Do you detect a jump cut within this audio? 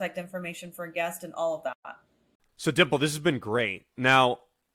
no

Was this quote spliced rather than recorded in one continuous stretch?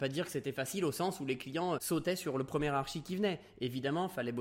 yes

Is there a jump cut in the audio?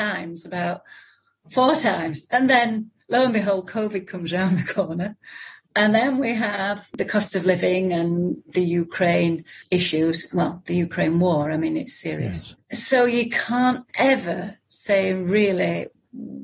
no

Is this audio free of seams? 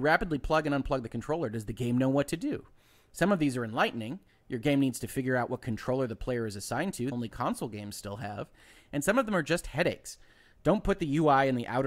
no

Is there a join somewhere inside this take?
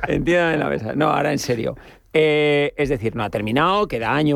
no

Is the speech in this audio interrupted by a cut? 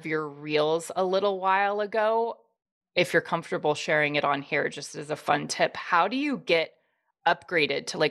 no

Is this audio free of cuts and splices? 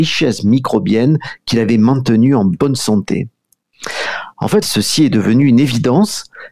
no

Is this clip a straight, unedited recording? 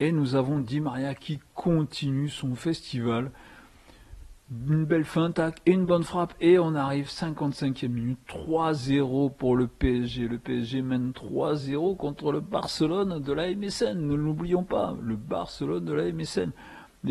no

